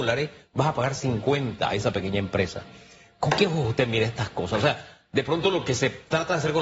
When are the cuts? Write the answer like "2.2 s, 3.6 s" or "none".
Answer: none